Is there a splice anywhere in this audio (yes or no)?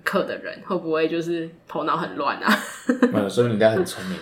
yes